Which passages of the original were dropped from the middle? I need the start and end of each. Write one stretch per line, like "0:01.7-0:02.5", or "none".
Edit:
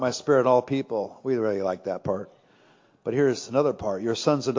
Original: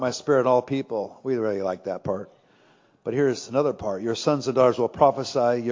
none